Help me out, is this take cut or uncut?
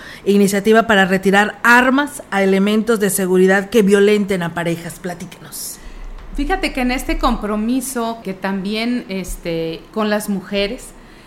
cut